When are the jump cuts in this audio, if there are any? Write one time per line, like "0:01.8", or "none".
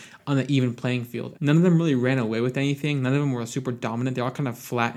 0:01.3